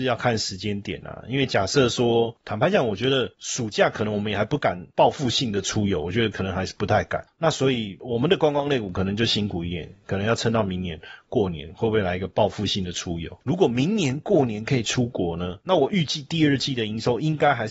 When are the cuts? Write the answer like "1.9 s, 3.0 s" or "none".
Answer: 15.6 s